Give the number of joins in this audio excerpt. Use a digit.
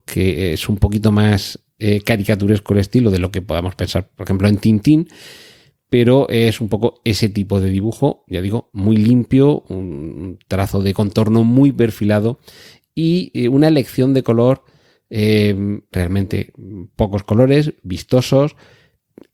1